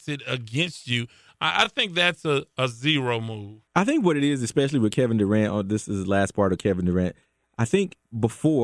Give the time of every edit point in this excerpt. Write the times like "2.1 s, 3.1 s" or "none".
none